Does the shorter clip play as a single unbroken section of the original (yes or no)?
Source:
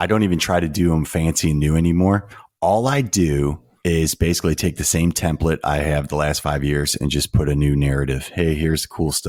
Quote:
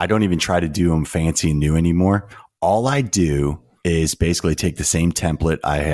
yes